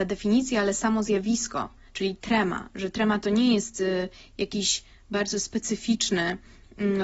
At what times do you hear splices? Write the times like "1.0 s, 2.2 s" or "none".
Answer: 1.9 s